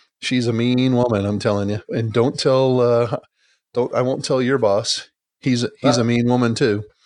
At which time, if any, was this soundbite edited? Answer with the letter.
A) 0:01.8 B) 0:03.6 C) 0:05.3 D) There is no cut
A